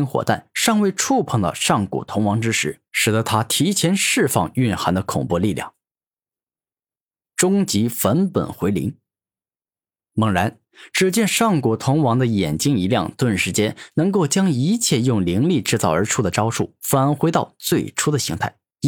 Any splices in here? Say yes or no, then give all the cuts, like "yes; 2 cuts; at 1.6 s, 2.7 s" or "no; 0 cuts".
yes; 1 cut; at 2.9 s